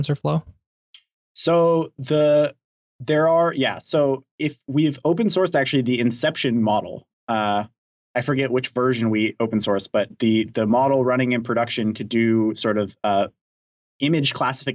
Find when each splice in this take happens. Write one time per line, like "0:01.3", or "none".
none